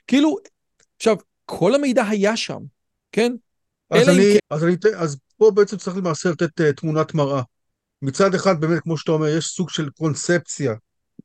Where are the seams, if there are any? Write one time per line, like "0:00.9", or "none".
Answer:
0:04.4